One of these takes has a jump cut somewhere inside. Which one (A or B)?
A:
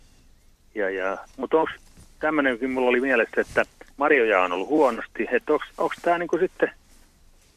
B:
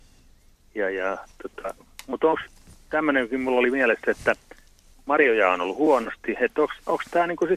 A